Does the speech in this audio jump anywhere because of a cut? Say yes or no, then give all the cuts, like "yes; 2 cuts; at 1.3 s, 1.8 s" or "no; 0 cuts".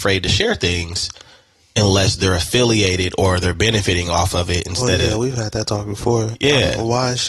no; 0 cuts